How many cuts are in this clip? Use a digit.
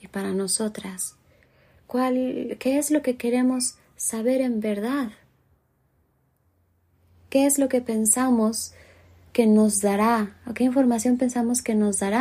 0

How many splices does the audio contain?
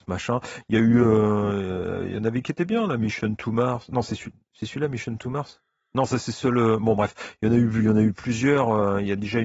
0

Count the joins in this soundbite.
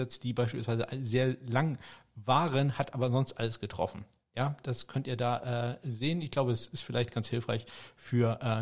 0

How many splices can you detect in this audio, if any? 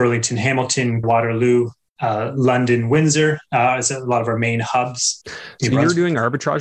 2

